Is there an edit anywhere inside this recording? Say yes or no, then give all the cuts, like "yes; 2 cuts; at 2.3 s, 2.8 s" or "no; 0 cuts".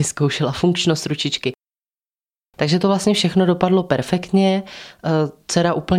no; 0 cuts